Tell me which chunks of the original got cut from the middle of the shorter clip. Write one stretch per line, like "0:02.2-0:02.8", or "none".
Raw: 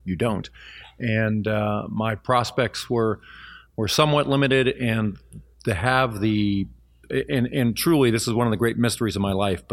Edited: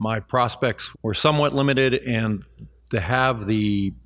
0:02.9-0:03.7